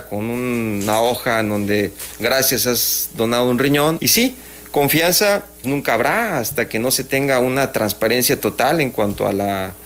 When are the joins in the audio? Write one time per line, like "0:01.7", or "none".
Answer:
0:04.0
0:05.6